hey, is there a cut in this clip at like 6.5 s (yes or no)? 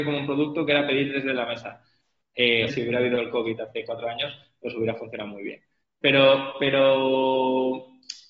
no